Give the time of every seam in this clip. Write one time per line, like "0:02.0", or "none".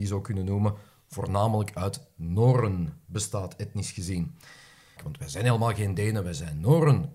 0:05.0